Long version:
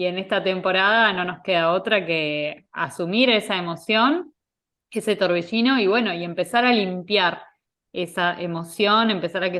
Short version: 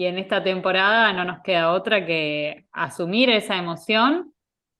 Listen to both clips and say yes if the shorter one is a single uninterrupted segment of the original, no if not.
yes